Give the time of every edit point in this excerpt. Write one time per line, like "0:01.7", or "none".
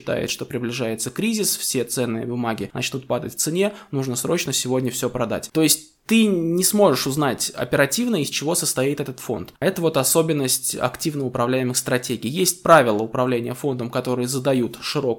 0:05.5